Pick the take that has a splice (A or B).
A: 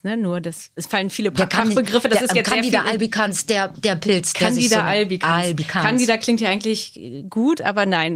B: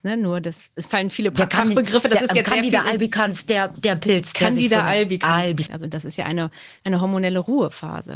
B